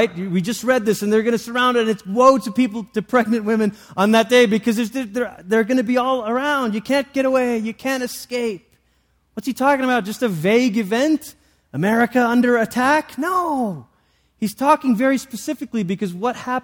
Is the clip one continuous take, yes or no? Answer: yes